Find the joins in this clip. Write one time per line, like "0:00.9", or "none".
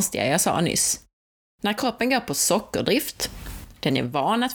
none